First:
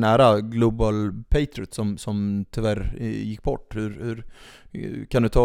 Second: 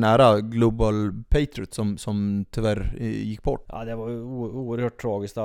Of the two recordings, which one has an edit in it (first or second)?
second